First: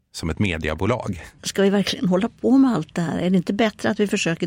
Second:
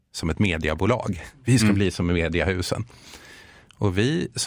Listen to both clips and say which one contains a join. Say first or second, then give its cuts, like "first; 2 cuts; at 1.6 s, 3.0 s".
first; 1 cut; at 1.4 s